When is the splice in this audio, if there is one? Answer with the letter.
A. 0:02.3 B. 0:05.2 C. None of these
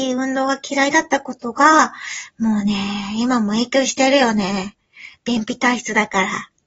C